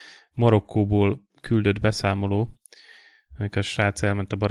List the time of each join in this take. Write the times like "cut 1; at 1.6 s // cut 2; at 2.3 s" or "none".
none

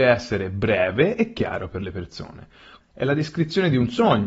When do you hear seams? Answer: cut 1; at 2.8 s

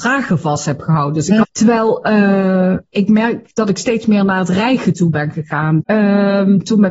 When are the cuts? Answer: cut 1; at 1.4 s // cut 2; at 5.8 s

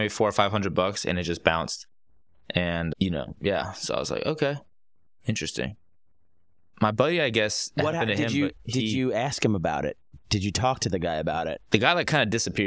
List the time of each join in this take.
none

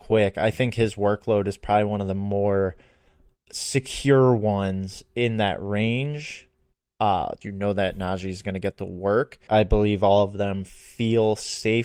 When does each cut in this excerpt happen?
cut 1; at 7.4 s // cut 2; at 9.5 s

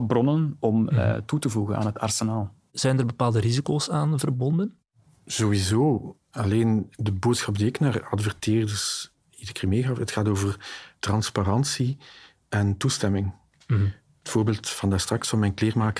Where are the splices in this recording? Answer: none

